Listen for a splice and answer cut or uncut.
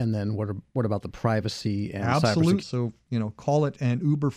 cut